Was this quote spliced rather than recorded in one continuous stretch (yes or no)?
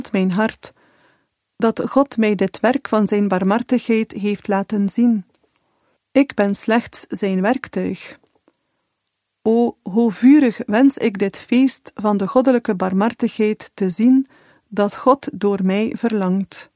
yes